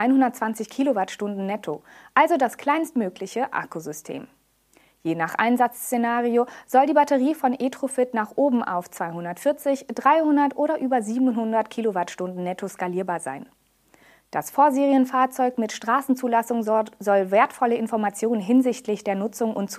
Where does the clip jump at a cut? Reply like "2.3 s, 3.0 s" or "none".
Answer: none